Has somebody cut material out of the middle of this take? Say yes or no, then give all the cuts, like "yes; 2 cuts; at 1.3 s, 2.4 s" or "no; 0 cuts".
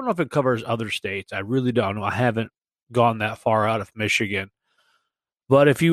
no; 0 cuts